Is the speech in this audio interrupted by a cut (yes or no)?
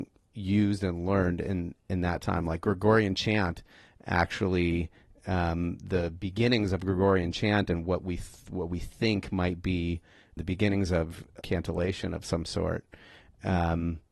yes